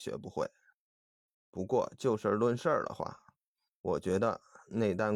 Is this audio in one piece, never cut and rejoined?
no; 1 cut; at 1.3 s

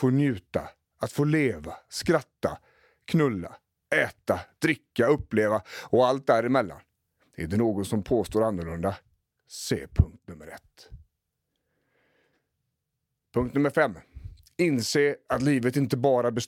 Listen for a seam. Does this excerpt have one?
no; 0 cuts

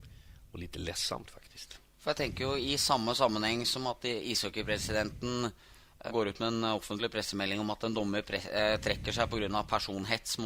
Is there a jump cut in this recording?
yes; 1 cut; at 6.1 s

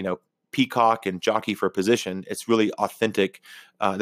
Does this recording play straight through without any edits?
yes; 0 cuts

